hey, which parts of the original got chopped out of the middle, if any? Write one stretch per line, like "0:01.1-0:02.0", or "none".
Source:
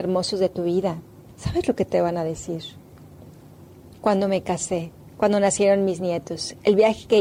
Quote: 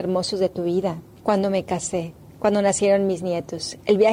0:01.2-0:03.9